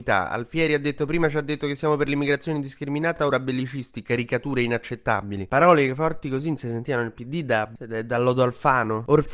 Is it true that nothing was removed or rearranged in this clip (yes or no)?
yes